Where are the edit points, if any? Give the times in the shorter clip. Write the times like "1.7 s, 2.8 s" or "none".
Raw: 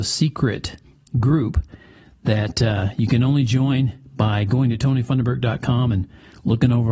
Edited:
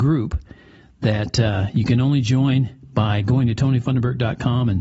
none